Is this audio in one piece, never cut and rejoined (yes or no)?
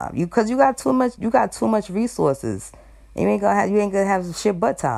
yes